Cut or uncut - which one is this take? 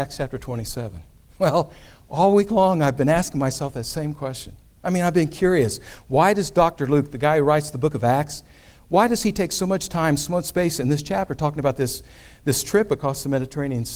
uncut